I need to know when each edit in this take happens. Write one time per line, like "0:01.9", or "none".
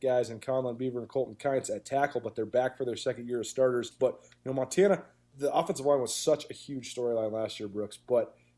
0:03.9
0:05.3